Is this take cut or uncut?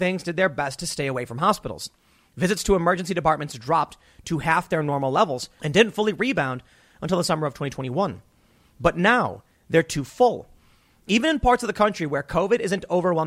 cut